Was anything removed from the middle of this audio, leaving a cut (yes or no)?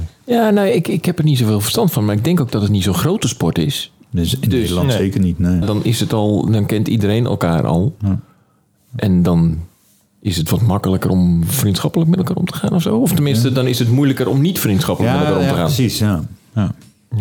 yes